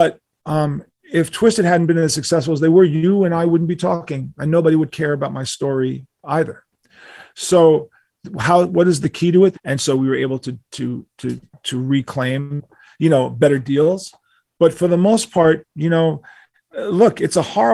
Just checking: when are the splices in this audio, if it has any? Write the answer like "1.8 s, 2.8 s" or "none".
9.5 s